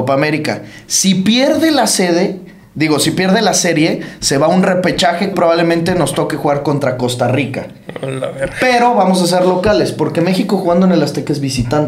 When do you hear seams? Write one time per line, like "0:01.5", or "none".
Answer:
0:05.3